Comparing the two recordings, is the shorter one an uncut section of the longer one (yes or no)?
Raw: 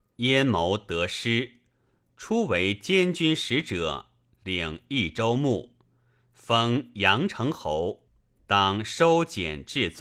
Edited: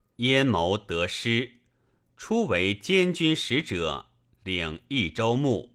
yes